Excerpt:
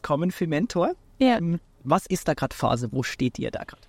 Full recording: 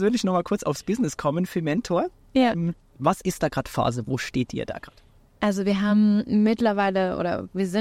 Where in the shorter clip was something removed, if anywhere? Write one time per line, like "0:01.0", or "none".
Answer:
none